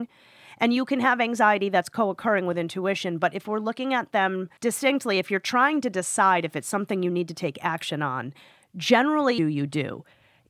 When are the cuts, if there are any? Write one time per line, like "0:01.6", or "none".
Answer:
0:04.6
0:09.4